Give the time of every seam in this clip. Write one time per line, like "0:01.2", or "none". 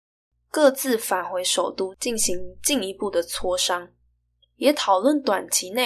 none